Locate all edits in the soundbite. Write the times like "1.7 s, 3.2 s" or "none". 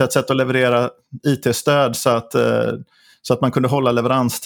none